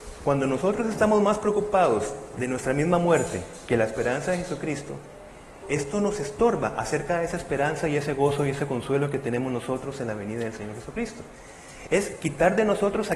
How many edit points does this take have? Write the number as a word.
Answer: one